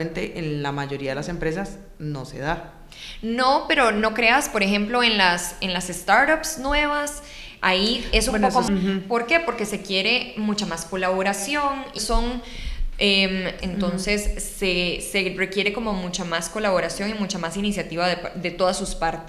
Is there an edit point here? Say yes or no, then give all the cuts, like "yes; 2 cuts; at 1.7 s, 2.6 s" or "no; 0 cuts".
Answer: yes; 3 cuts; at 8.7 s, 12.0 s, 13.6 s